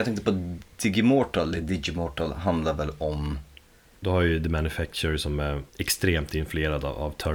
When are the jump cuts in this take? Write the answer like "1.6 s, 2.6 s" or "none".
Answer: 4.0 s, 5.7 s